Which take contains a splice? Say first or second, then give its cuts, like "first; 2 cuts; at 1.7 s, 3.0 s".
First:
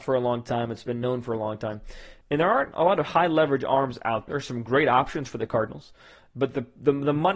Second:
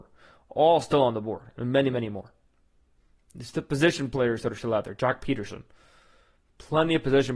first; 2 cuts; at 2.2 s, 4.3 s